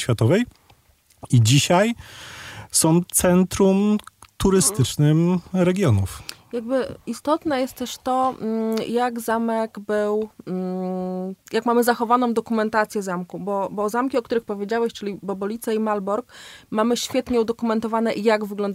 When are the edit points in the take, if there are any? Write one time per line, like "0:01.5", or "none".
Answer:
none